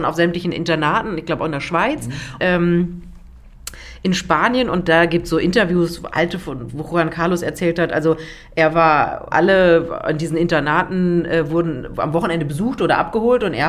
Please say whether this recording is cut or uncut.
cut